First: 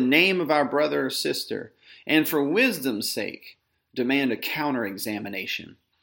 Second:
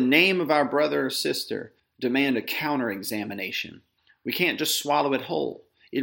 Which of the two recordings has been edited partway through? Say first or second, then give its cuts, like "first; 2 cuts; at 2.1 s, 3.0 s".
second; 1 cut; at 1.8 s